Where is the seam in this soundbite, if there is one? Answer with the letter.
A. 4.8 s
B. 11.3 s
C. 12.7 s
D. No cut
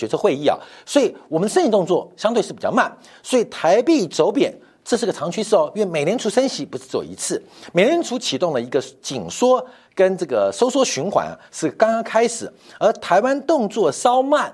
D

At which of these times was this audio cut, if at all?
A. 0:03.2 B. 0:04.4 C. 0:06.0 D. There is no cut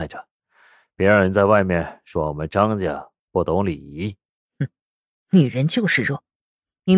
B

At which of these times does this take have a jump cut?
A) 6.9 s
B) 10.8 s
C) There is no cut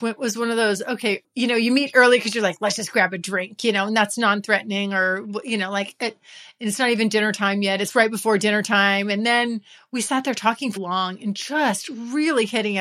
B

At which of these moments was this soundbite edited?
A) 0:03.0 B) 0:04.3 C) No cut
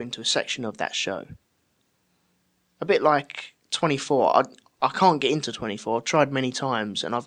C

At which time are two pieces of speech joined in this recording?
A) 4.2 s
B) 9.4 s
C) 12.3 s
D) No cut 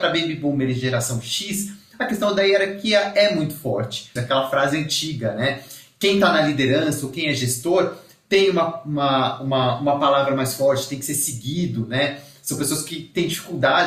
A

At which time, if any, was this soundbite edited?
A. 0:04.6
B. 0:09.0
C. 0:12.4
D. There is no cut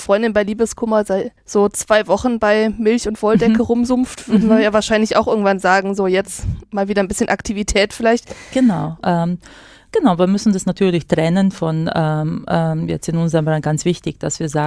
B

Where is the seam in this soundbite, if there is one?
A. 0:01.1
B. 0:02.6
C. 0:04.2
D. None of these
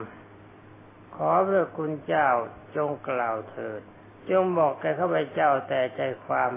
C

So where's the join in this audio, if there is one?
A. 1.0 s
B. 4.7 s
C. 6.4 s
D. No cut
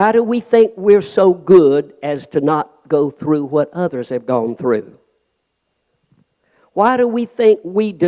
D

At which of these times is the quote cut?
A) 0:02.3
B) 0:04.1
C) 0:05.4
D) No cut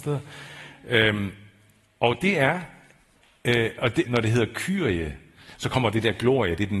B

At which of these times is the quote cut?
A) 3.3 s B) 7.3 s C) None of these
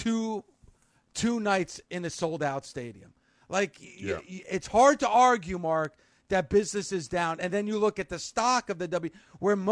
C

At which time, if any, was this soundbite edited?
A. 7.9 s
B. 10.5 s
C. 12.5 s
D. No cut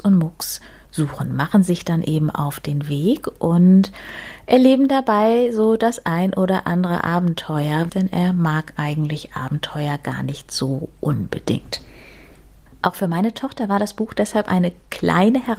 A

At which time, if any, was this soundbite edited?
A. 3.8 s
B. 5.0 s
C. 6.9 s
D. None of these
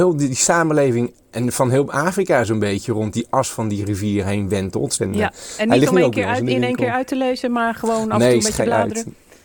B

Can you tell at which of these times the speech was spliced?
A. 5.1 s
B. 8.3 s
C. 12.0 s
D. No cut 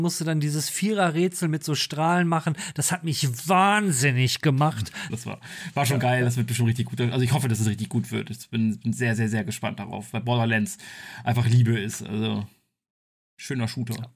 A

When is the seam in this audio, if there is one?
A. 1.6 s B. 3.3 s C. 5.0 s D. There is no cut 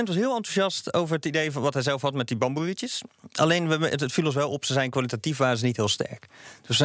D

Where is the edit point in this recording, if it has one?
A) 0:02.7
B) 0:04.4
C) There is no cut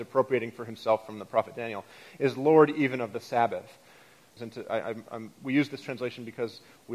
B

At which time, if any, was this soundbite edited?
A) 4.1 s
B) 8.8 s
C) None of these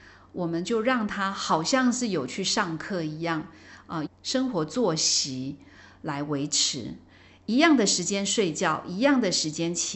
A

